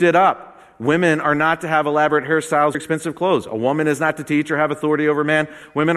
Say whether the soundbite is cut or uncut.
cut